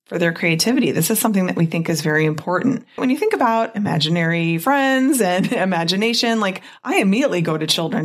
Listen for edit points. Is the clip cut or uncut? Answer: cut